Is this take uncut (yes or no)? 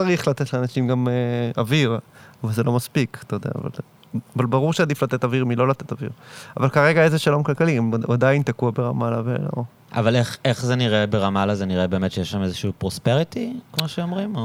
yes